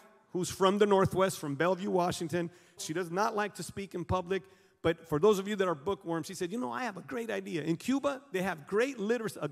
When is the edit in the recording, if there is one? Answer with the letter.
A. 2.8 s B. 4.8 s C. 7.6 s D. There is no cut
A